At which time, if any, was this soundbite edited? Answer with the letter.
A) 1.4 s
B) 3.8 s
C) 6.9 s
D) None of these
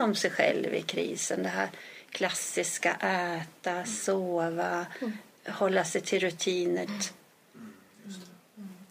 C